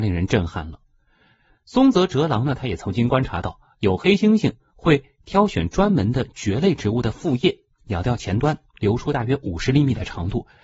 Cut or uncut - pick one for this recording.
uncut